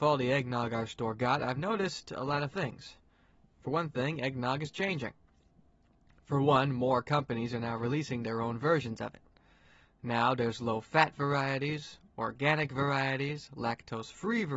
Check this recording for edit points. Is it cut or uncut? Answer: uncut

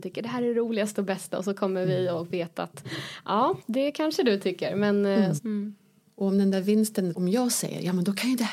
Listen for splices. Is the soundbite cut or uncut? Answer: cut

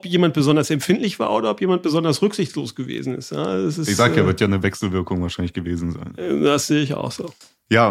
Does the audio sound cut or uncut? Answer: uncut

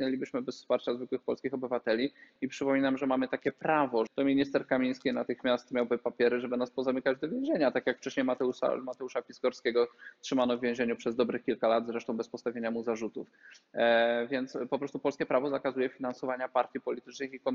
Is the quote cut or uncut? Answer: cut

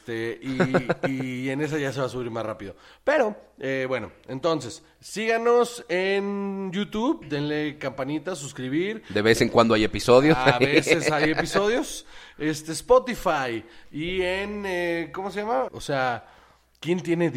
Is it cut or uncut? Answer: cut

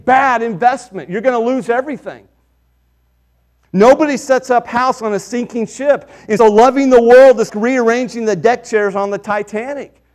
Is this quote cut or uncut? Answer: cut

